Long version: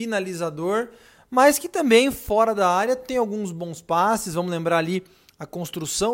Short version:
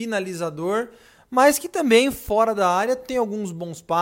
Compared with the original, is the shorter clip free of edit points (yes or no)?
yes